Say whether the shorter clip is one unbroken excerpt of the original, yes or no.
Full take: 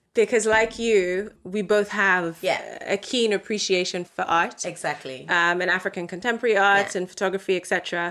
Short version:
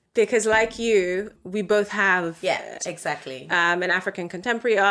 no